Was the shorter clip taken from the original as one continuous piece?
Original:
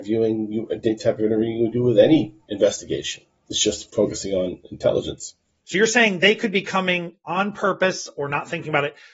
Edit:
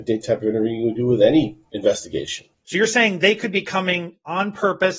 no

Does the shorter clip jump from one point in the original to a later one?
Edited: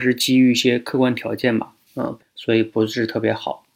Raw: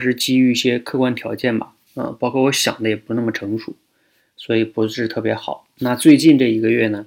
yes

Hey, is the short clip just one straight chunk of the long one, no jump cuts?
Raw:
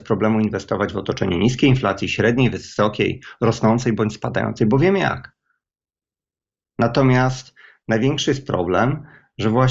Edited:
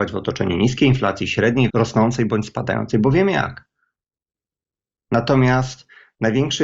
no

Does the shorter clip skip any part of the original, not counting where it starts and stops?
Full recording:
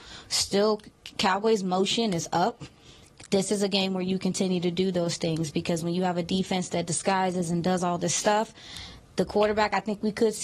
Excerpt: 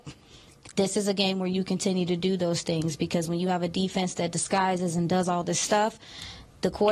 no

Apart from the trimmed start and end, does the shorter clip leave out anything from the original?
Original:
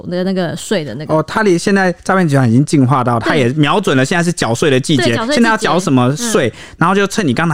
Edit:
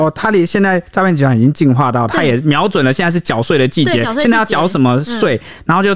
no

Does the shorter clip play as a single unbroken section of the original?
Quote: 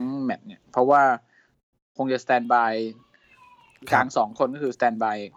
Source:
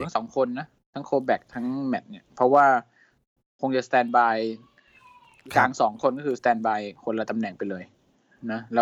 yes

